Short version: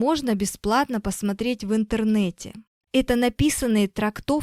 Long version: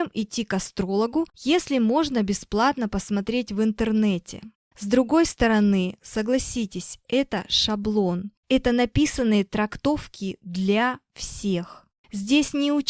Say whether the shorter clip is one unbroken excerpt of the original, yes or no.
no